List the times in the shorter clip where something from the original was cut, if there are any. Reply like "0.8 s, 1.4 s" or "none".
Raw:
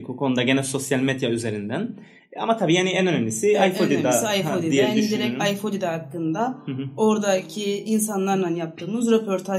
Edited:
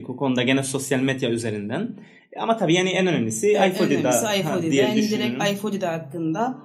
none